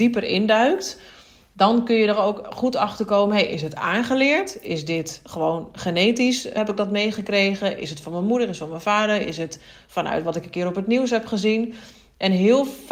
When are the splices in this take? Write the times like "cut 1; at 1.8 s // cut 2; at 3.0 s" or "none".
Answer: cut 1; at 6.6 s